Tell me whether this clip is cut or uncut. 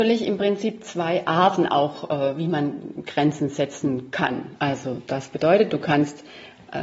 cut